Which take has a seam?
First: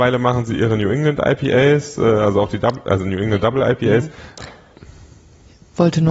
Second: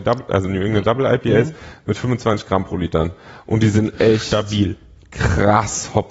first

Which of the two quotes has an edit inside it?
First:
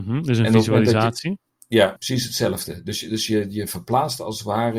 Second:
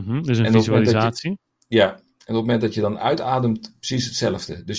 first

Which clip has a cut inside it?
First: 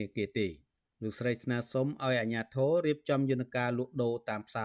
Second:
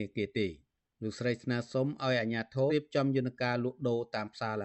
second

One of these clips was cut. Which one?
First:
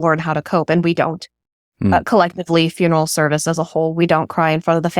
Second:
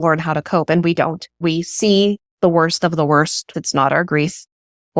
second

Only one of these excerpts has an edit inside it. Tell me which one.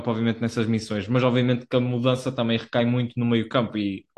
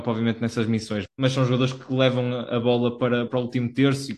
second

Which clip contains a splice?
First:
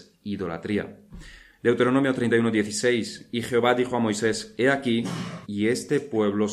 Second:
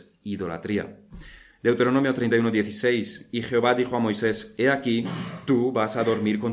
first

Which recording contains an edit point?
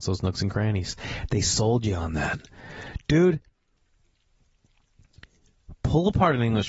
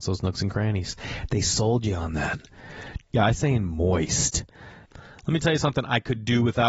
second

